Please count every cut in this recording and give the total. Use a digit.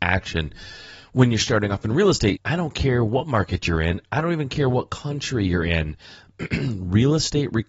1